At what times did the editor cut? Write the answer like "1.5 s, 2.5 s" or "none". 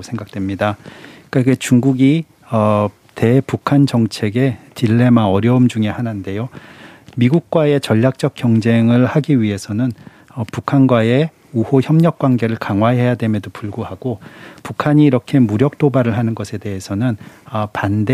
none